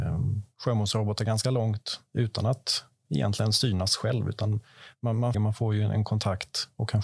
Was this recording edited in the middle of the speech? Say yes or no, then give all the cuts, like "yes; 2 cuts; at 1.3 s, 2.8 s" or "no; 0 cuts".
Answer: yes; 1 cut; at 5.3 s